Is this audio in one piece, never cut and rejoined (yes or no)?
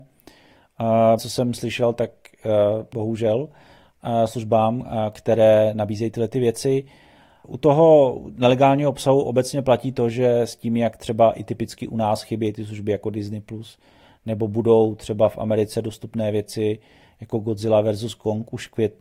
no